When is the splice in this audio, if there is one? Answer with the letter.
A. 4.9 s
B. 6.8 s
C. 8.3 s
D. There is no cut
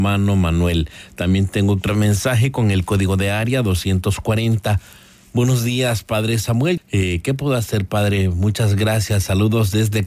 B